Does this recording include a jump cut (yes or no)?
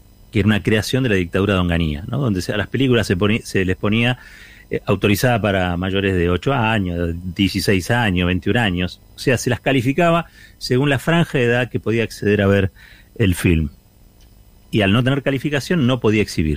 yes